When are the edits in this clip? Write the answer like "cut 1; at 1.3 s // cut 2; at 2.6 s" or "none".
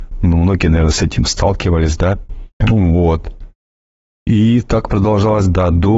cut 1; at 2.5 s